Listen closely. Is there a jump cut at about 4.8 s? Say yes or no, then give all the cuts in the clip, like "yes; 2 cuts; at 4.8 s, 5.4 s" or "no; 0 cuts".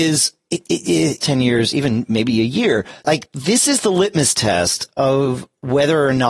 no; 2 cuts; at 1.2 s, 3.0 s